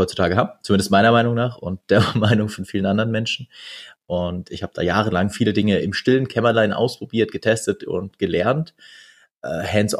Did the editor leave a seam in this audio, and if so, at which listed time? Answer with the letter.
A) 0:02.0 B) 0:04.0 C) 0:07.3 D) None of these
B